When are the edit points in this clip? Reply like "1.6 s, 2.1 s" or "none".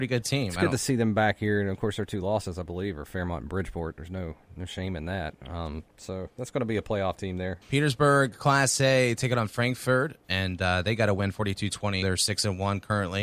5.9 s, 7.6 s, 12.0 s